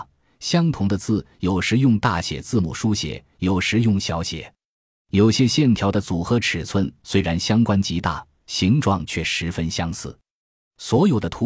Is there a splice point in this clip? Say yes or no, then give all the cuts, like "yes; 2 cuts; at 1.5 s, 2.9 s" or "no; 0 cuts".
no; 0 cuts